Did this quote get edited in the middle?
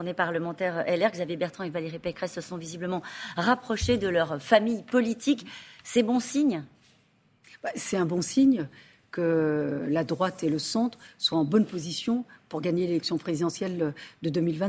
no; 0 cuts

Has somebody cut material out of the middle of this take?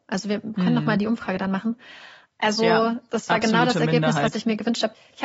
yes; 1 cut; at 2.3 s

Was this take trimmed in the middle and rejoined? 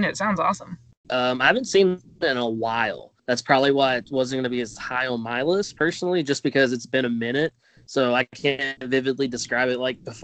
yes; 2 cuts; at 1.0 s, 3.2 s

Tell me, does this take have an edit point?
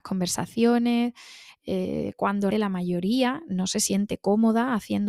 yes; 1 cut; at 2.5 s

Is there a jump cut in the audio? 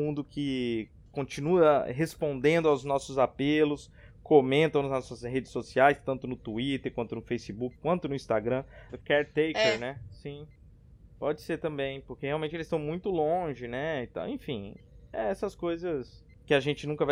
yes; 1 cut; at 8.9 s

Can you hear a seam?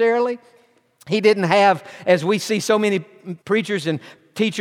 yes; 1 cut; at 3.4 s

